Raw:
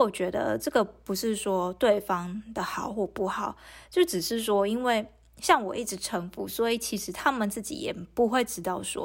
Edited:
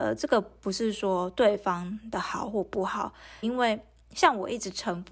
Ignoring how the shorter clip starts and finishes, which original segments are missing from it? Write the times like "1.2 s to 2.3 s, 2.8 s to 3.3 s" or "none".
3.9 s to 4.7 s